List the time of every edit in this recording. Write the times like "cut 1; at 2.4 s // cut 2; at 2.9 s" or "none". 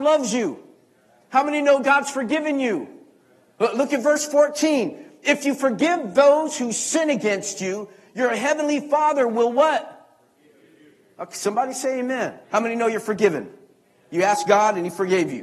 cut 1; at 12.4 s